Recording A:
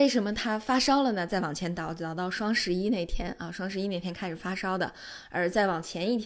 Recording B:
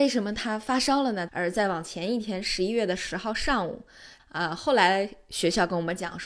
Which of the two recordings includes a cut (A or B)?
B